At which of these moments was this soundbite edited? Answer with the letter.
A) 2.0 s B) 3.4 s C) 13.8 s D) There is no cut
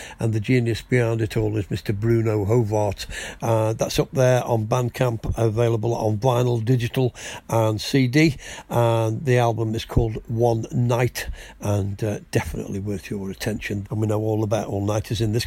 C